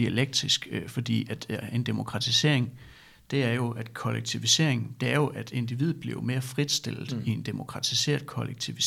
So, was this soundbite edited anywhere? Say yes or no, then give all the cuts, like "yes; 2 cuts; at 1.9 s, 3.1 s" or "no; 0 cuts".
no; 0 cuts